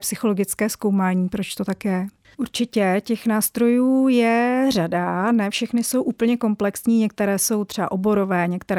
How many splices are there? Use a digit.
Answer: 1